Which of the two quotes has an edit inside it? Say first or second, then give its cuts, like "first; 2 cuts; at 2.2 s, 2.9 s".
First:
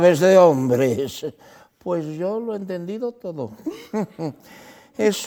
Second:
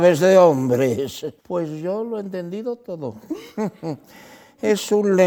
second; 1 cut; at 1.4 s